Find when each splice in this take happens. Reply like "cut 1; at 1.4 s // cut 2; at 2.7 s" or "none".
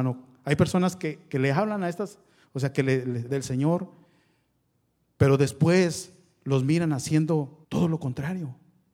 cut 1; at 3.3 s // cut 2; at 7.6 s